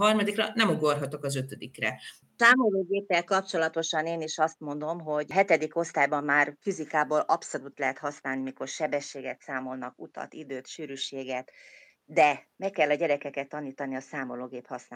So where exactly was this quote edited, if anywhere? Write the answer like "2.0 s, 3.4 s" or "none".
2.2 s, 12.0 s